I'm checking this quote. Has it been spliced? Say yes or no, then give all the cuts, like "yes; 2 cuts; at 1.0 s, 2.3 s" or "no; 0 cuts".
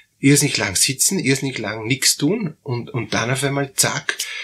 no; 0 cuts